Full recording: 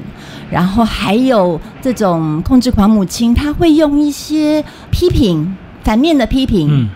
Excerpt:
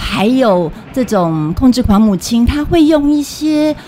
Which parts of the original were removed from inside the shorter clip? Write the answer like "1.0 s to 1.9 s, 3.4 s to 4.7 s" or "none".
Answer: none

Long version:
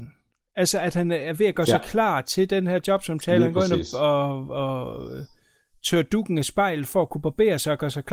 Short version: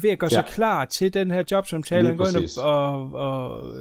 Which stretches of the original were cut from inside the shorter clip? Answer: none

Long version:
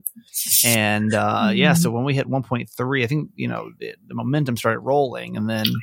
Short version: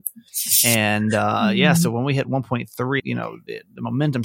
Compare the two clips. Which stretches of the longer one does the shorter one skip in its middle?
3.0 s to 3.3 s

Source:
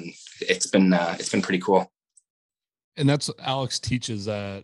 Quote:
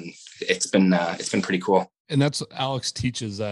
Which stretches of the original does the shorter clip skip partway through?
2.0 s to 2.9 s

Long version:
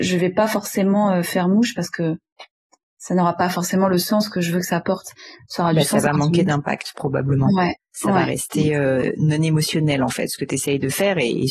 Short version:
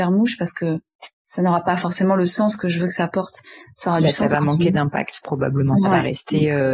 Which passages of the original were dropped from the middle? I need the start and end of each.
2.5 s to 2.9 s, 7.6 s to 8.1 s

